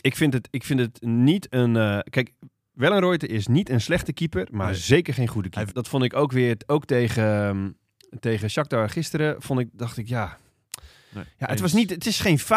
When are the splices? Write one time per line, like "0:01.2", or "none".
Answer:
0:05.7

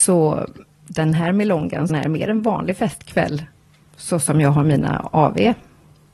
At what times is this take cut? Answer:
0:01.9

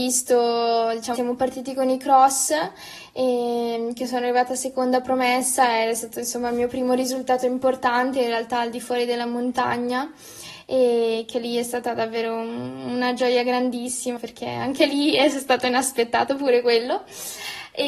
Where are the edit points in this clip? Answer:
0:01.2
0:14.2

